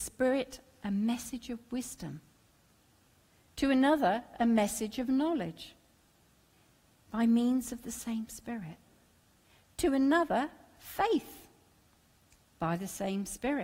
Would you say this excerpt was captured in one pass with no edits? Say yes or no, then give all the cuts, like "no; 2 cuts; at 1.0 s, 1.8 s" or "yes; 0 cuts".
yes; 0 cuts